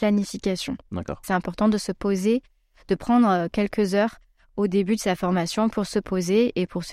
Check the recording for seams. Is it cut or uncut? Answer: cut